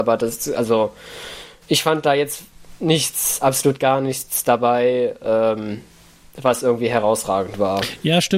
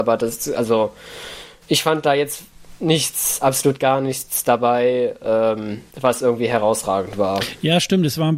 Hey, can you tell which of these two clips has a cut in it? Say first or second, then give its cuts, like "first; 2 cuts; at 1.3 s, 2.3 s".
second; 1 cut; at 5.9 s